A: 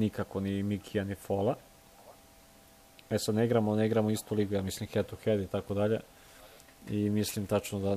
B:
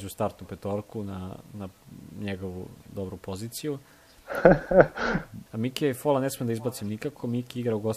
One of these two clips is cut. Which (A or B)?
B